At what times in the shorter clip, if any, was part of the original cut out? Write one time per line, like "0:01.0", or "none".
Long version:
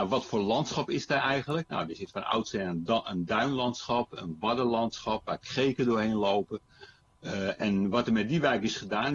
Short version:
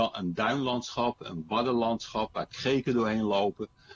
none